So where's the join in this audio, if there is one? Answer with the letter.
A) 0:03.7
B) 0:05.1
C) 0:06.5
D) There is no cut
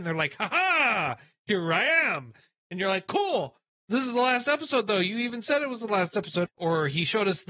C